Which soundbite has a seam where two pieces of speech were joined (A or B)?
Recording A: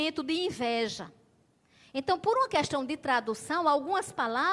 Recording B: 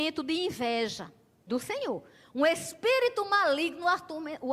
B